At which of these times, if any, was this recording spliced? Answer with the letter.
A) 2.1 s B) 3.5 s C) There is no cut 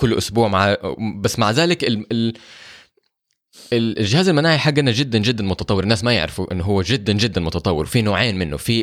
C